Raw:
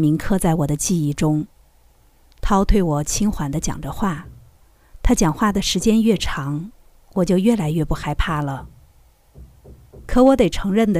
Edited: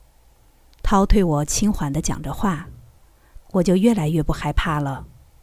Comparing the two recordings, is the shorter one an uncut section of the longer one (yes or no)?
no